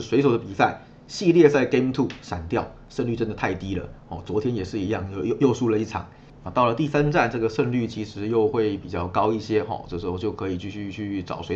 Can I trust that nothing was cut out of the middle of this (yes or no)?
yes